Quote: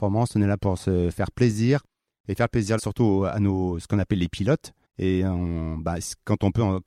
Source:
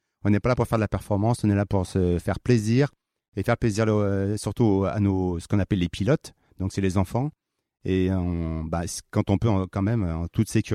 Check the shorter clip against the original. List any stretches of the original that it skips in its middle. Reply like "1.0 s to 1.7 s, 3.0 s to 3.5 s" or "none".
3.9 s to 4.4 s, 6.5 s to 7.7 s

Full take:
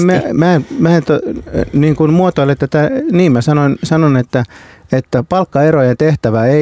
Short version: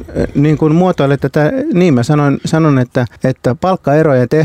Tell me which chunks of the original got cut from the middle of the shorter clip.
4.5 s to 4.8 s

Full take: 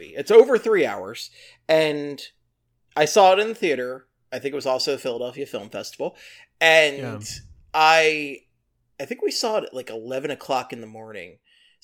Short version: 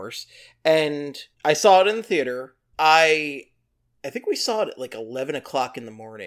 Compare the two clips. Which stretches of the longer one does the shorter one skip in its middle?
2.4 s to 2.8 s, 4.2 s to 7.7 s

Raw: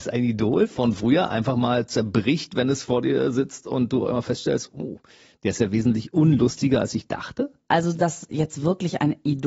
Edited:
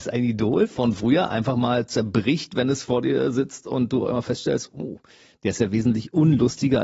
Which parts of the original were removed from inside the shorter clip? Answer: none

